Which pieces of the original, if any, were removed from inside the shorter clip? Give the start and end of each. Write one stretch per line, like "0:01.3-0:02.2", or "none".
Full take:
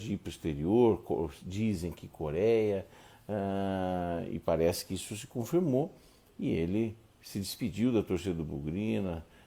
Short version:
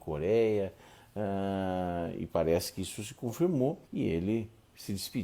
0:06.0-0:06.3